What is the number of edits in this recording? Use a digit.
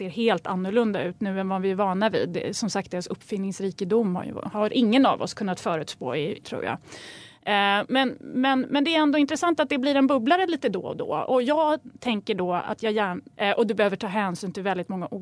2